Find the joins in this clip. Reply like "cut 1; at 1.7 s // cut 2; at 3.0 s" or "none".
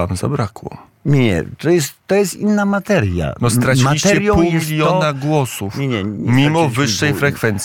none